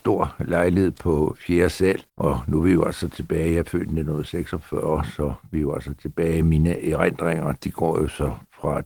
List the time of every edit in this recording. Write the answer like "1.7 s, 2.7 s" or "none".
2.1 s